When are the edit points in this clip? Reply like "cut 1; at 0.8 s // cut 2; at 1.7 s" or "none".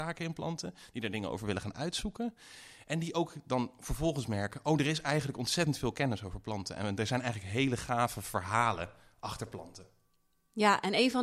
none